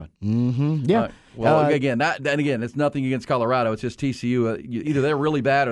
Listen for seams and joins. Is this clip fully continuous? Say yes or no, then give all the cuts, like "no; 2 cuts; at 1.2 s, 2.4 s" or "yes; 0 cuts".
yes; 0 cuts